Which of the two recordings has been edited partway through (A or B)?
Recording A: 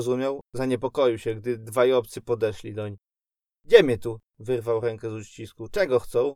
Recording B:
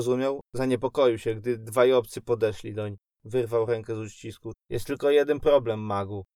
B